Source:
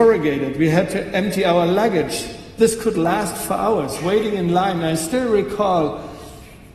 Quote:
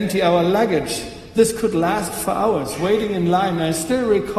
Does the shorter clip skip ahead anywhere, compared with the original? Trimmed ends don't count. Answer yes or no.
no